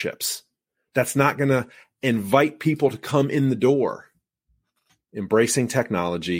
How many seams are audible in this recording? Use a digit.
1